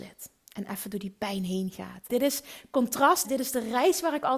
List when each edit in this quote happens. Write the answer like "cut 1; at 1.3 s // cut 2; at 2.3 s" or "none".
cut 1; at 2.1 s // cut 2; at 3.2 s